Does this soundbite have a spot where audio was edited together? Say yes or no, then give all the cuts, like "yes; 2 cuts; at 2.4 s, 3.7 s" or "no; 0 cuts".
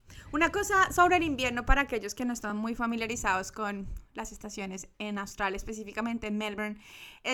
no; 0 cuts